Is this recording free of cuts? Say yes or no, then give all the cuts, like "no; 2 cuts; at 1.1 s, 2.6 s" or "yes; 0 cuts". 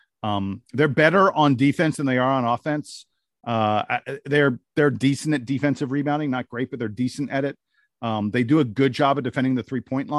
yes; 0 cuts